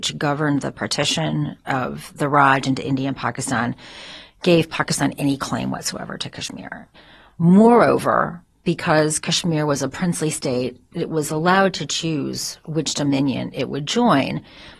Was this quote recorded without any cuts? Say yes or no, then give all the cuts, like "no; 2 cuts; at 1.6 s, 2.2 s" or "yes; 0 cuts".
yes; 0 cuts